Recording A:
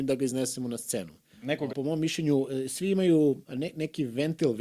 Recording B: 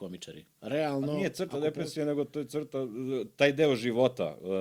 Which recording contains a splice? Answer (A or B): A